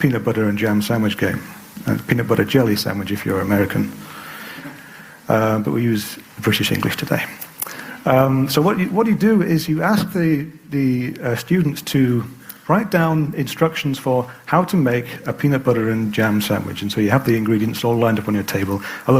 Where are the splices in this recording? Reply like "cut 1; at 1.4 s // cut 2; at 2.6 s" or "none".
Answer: none